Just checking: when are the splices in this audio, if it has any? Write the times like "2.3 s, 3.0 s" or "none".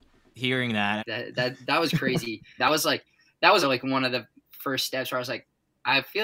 1.0 s, 2.6 s, 3.6 s